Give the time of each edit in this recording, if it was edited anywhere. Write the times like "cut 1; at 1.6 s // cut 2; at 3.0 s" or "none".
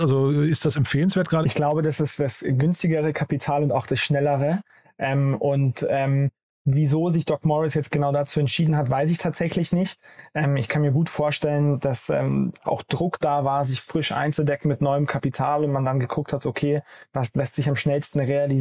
cut 1; at 1.4 s // cut 2; at 12.6 s